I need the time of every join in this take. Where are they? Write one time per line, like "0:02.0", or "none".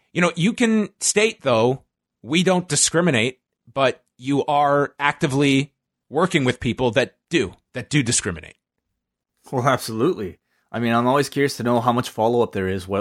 none

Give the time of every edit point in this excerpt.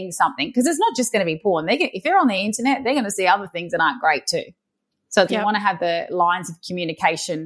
0:05.3

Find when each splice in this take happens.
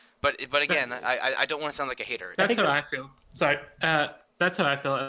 0:02.3

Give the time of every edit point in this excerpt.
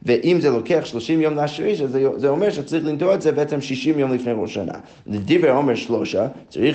none

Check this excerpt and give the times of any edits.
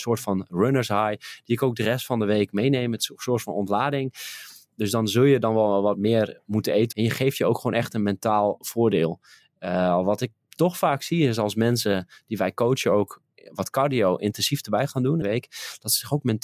0:06.9
0:15.2

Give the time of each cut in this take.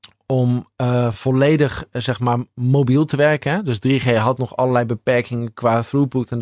none

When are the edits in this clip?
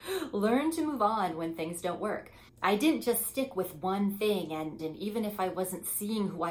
0:02.5
0:04.8

